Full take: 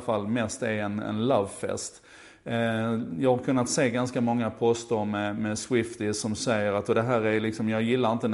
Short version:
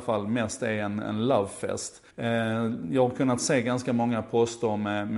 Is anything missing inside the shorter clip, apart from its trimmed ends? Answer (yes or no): yes